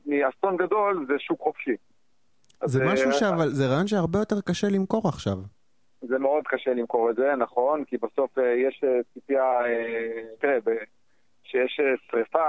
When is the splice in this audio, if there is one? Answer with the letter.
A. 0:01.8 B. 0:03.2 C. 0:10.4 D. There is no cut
C